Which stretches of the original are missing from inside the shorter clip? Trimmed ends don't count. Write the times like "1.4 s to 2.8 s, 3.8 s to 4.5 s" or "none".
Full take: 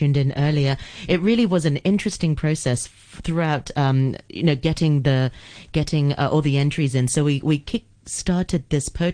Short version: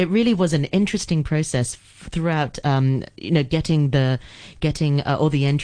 none